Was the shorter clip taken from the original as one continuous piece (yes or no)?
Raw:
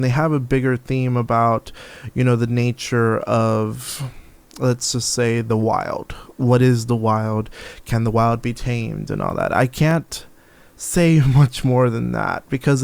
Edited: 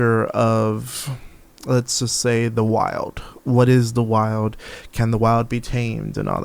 yes